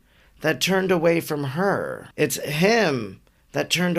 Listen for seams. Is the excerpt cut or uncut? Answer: cut